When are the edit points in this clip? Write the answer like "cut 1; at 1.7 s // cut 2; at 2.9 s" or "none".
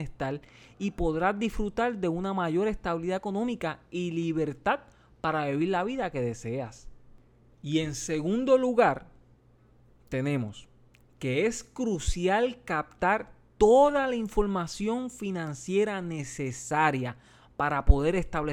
none